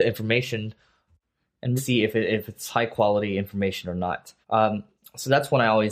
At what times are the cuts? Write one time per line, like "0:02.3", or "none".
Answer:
0:01.8
0:04.4